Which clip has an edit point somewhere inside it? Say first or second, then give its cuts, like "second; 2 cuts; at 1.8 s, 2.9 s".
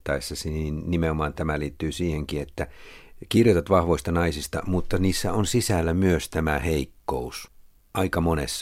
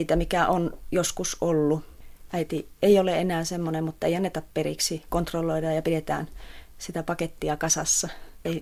second; 1 cut; at 2.3 s